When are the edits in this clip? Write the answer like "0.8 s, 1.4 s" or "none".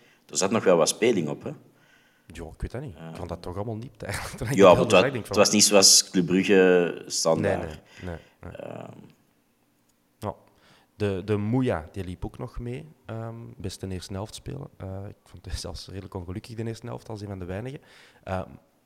13.6 s